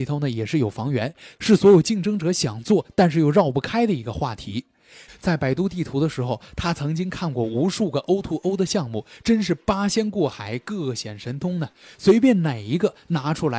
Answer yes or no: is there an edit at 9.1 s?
no